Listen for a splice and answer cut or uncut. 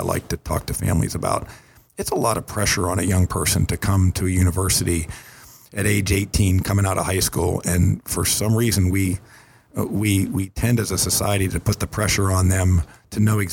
uncut